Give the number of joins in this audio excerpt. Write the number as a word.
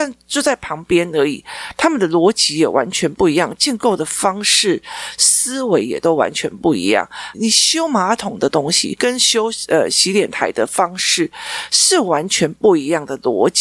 one